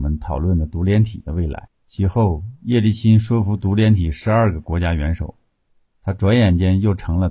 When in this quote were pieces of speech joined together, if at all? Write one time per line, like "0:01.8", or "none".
0:01.7